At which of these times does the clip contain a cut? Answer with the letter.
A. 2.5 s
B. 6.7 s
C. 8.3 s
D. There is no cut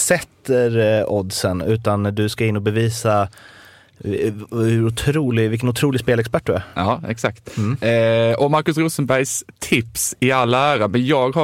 D